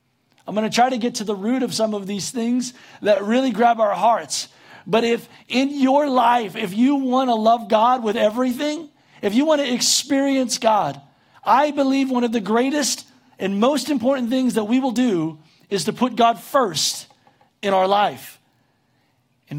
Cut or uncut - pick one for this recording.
uncut